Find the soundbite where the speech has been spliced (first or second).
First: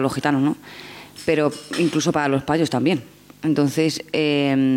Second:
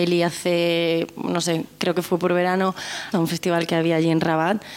second